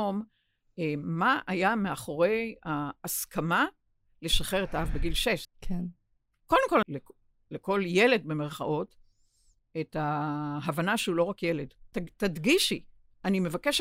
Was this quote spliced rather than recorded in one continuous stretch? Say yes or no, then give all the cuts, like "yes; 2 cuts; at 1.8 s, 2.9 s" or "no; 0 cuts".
yes; 3 cuts; at 5.4 s, 6.8 s, 11.9 s